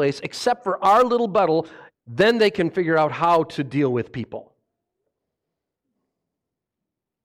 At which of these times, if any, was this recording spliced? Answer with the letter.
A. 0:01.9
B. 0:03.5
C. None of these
A